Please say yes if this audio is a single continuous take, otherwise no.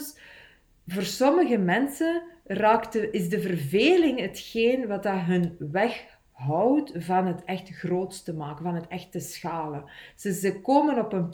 yes